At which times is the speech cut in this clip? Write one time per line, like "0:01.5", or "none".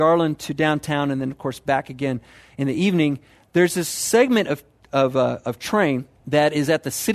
0:06.2